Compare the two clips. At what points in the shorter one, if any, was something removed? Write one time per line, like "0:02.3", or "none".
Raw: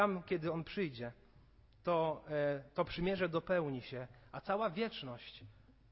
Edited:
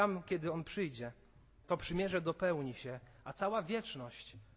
0:01.6